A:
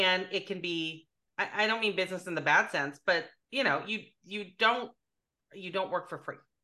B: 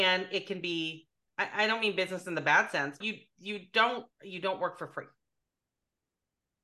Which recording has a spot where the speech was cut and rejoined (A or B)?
B